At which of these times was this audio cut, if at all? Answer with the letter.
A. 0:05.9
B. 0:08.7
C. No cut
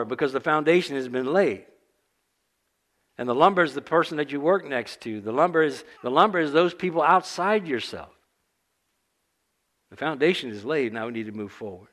A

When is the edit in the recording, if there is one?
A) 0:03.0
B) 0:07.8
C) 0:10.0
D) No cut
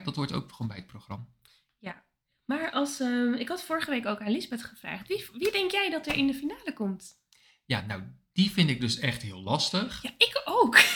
D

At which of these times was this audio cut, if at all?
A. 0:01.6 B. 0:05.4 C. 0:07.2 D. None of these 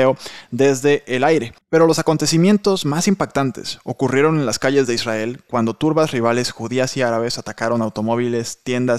A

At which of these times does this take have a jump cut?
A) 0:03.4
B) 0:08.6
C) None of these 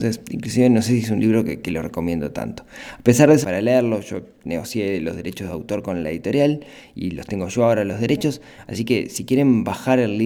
A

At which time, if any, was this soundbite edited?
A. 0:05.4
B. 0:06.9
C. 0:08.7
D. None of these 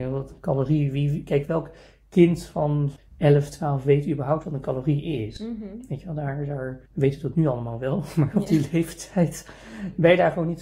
B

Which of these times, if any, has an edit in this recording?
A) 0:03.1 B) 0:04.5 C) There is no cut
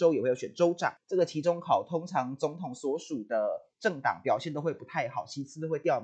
C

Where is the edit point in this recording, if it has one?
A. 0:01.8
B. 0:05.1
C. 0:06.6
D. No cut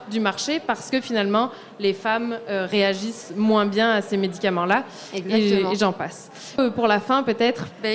C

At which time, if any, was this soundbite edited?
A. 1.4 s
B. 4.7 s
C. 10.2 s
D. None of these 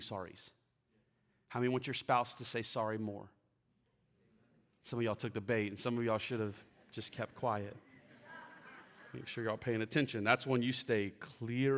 D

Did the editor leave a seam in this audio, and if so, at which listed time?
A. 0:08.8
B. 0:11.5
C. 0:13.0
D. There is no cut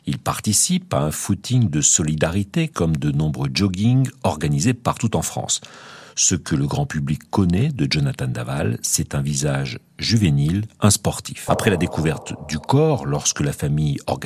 B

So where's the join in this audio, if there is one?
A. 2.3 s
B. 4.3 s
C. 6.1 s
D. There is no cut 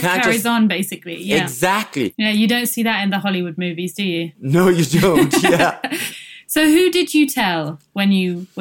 C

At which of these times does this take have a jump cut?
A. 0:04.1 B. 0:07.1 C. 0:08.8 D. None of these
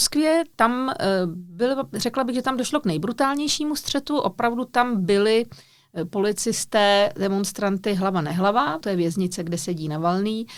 C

